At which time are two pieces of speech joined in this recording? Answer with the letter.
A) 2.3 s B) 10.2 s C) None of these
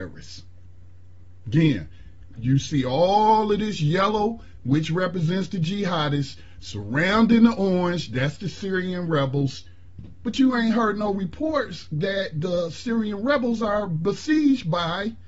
A